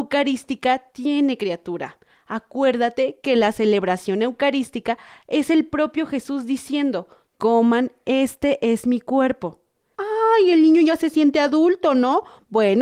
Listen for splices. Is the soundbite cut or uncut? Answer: cut